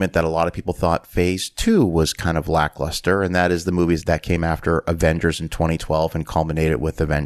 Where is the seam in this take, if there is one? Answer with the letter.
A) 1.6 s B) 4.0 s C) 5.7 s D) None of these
B